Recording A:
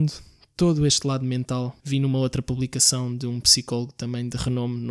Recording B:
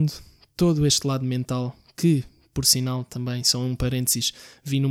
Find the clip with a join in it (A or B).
A